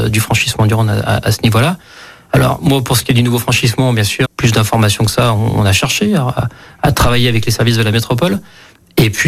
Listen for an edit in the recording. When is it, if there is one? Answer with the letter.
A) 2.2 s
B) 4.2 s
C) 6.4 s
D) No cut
B